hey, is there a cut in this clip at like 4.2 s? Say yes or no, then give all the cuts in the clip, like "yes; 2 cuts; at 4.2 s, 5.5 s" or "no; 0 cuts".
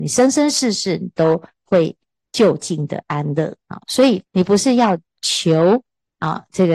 yes; 1 cut; at 4.2 s